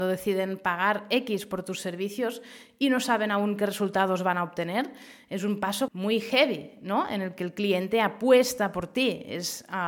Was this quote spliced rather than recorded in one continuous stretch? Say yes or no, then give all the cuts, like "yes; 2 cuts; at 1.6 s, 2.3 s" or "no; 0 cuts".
yes; 1 cut; at 5.9 s